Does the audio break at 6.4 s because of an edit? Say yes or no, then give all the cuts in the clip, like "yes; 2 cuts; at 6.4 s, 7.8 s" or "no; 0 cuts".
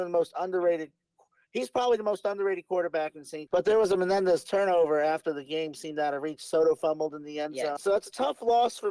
no; 2 cuts; at 3.5 s, 7.8 s